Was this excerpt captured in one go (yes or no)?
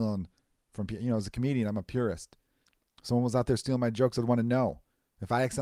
yes